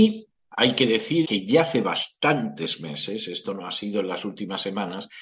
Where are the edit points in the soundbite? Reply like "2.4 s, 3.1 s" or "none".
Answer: 1.2 s